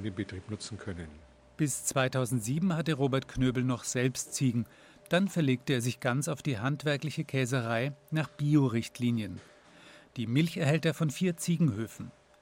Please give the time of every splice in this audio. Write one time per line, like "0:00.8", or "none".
none